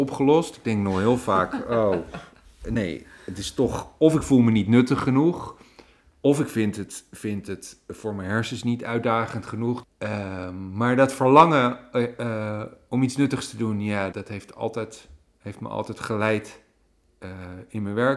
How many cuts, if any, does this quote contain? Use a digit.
2